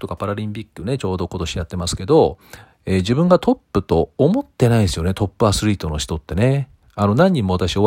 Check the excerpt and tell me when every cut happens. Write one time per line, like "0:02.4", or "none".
none

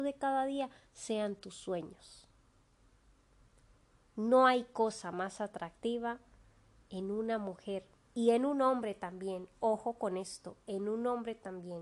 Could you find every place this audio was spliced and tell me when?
none

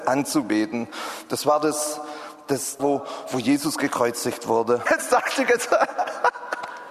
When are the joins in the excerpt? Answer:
0:02.8
0:04.9

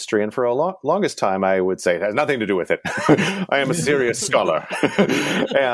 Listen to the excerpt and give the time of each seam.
none

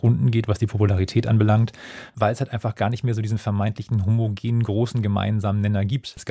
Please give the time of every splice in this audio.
0:02.1

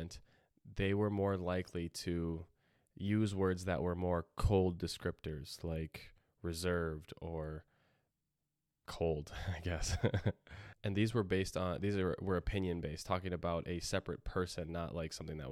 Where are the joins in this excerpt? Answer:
none

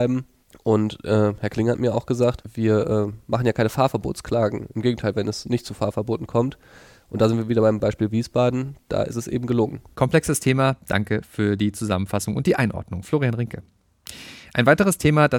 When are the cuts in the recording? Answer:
0:05.1

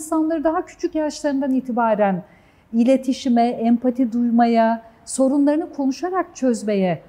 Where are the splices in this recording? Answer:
none

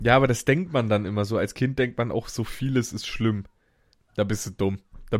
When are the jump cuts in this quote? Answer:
0:03.9

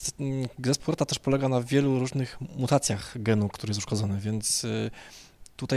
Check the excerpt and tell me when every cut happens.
none

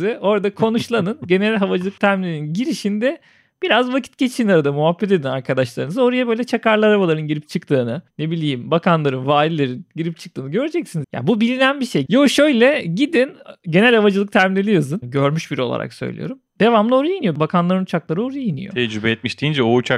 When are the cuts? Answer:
0:11.0
0:12.1
0:15.0

